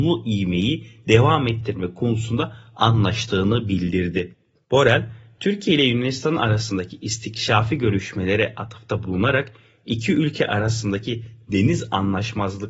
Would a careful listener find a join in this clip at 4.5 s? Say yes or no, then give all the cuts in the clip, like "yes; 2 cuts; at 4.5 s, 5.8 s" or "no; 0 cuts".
yes; 1 cut; at 4.5 s